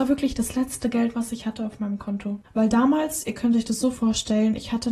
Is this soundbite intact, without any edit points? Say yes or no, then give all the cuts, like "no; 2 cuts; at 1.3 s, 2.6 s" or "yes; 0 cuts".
no; 1 cut; at 2.4 s